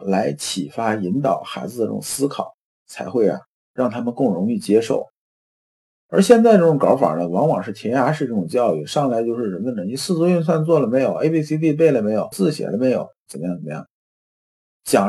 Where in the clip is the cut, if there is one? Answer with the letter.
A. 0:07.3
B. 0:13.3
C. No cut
B